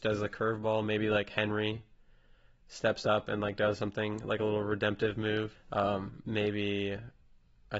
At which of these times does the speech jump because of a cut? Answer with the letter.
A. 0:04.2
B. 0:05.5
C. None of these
B